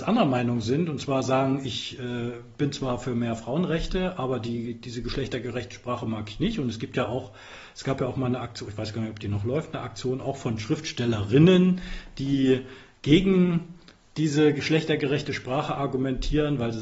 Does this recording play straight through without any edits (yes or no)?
yes